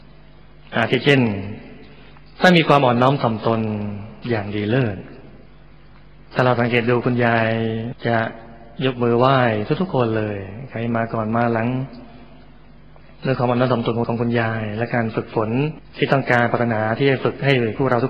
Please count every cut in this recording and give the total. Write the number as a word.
two